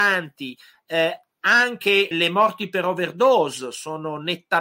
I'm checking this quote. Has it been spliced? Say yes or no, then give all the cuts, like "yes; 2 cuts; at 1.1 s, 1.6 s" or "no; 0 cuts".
yes; 1 cut; at 2.1 s